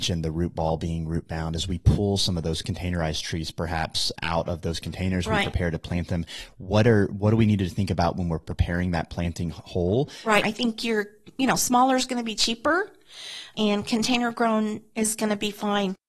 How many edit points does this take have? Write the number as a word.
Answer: one